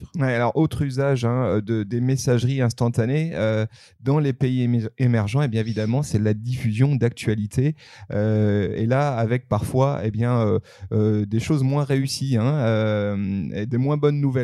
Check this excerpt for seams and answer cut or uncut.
uncut